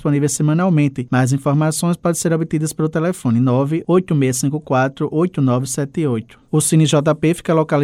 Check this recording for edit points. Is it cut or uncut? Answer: uncut